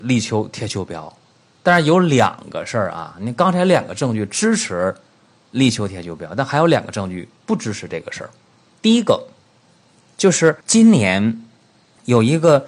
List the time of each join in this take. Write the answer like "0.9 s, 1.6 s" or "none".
8.8 s, 10.6 s